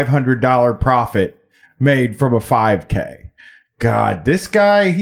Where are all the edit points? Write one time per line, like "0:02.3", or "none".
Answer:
none